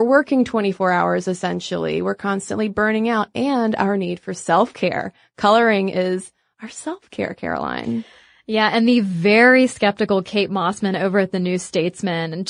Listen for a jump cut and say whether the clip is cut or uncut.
uncut